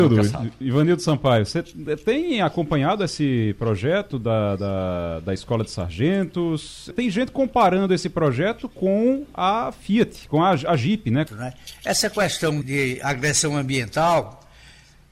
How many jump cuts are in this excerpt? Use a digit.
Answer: 3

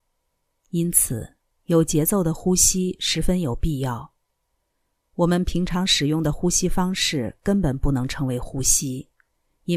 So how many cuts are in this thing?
0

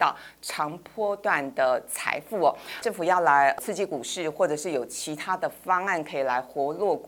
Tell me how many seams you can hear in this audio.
1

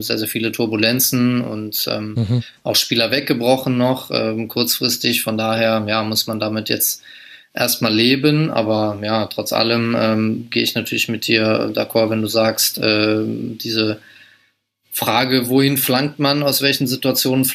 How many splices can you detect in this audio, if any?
0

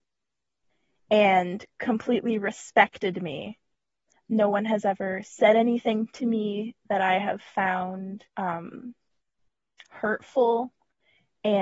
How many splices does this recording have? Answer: 2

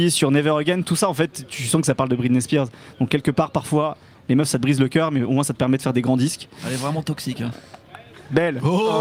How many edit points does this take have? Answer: 0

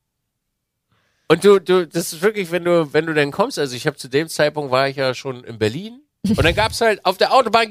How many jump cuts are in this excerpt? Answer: 1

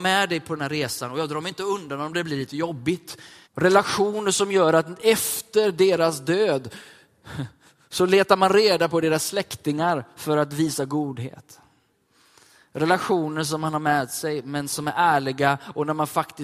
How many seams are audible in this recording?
1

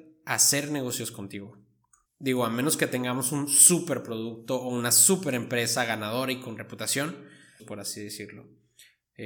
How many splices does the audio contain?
2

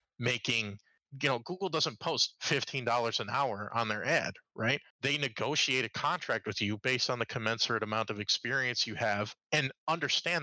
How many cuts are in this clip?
1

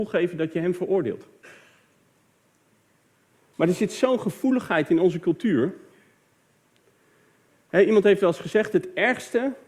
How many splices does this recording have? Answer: 1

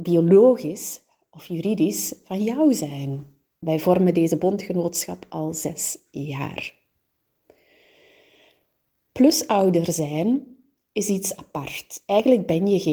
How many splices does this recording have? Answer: 1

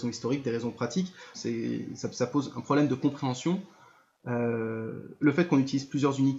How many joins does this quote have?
2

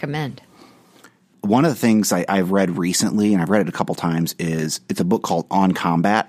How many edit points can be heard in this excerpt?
0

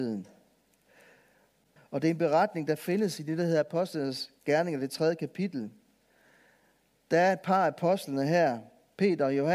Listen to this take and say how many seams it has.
1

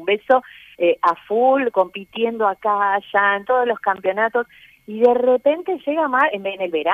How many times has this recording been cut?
0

